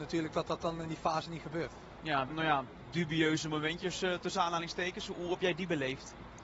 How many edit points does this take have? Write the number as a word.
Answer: one